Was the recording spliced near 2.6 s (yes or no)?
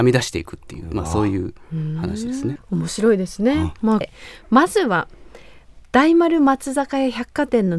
yes